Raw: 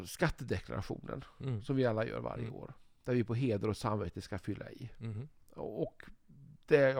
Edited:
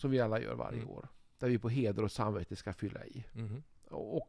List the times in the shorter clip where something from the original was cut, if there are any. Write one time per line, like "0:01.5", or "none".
none